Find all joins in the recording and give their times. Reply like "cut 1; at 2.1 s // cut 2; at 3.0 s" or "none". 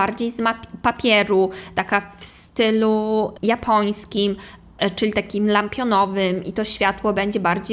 none